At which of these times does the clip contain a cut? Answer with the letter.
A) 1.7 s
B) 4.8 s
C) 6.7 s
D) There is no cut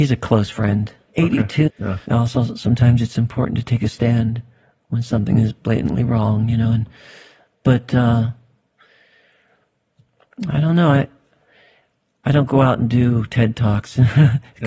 A